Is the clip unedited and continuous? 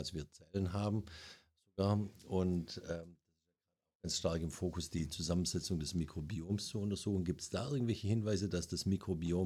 yes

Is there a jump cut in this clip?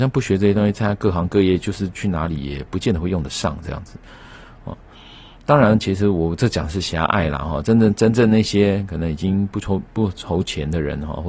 no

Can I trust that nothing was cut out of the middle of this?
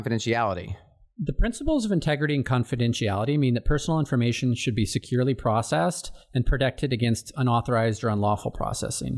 yes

